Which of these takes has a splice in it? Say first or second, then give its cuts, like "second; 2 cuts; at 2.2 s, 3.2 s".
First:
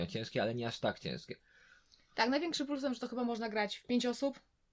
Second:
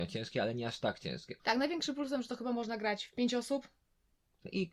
second; 1 cut; at 1.4 s